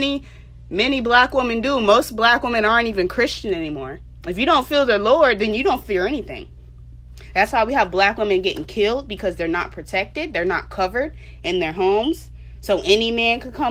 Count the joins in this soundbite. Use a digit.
1